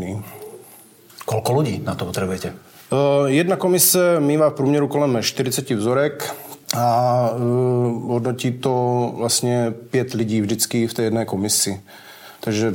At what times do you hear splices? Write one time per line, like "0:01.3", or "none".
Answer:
0:06.6